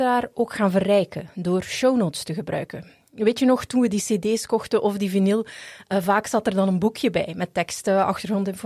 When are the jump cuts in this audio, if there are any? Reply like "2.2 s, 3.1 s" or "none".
none